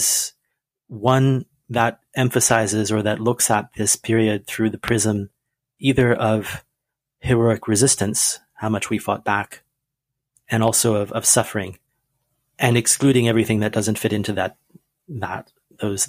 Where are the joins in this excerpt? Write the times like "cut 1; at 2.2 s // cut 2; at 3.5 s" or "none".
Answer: none